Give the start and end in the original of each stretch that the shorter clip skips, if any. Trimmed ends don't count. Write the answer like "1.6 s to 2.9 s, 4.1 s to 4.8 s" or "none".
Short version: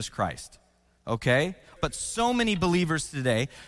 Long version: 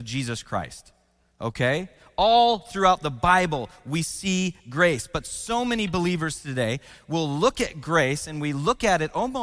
2.1 s to 5.1 s